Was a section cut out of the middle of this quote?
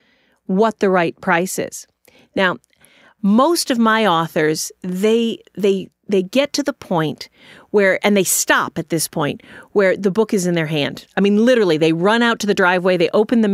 no; 0 cuts

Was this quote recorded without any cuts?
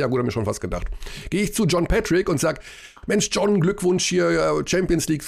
yes; 0 cuts

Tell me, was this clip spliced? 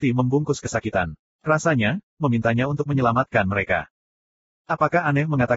yes; 1 cut; at 2.1 s

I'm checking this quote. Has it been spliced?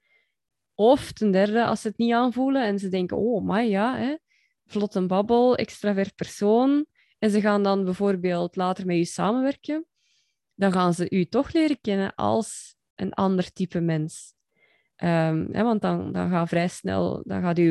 no; 0 cuts

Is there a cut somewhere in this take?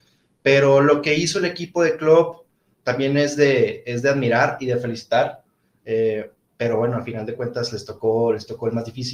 no; 0 cuts

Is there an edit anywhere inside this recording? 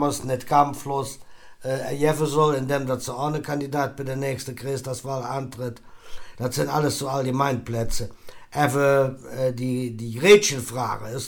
no; 0 cuts

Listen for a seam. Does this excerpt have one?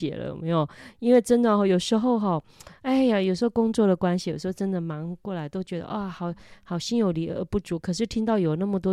no; 0 cuts

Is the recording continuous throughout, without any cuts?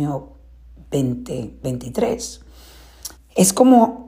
no; 1 cut; at 3.2 s

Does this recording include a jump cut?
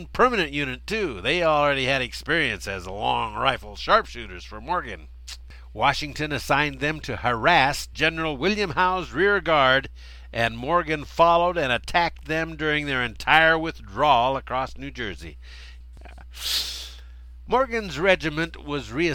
yes; 1 cut; at 15.8 s

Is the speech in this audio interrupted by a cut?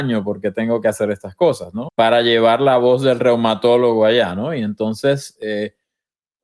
yes; 1 cut; at 1.9 s

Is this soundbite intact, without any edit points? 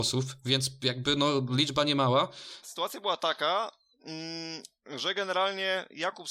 no; 1 cut; at 2.6 s

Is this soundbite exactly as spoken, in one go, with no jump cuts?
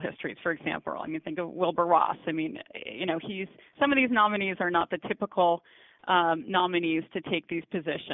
yes; 0 cuts

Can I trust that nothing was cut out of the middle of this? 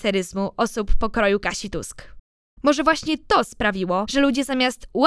yes; 0 cuts

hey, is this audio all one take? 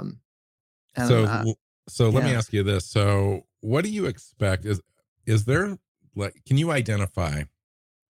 yes; 0 cuts

